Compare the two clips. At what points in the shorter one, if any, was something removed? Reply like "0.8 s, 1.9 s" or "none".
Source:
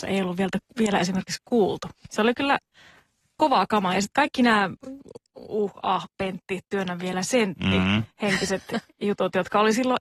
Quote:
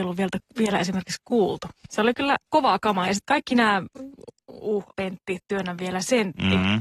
2.5 s, 4.9 s